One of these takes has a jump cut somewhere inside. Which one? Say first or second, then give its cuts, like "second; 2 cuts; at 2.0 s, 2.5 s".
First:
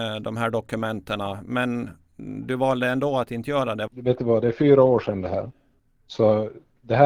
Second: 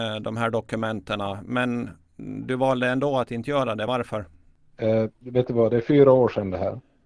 first; 1 cut; at 3.9 s